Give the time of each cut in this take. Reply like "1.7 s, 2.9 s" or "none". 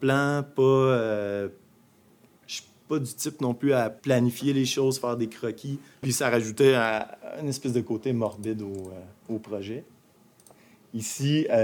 6.0 s